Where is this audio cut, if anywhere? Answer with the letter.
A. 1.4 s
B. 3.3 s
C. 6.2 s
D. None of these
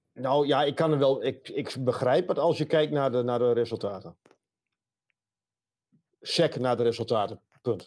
A